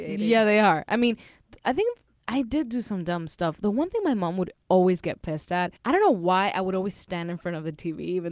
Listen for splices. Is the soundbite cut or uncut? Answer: cut